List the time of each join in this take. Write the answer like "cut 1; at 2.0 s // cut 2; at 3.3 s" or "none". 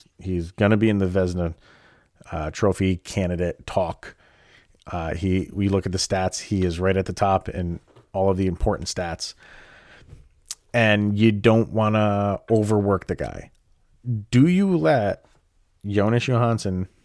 none